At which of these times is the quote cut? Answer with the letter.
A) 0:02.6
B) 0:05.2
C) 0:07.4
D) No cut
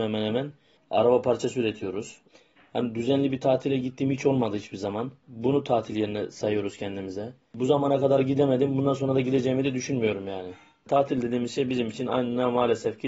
B